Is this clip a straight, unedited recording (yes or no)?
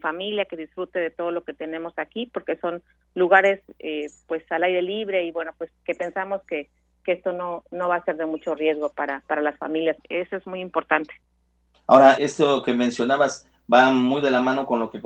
no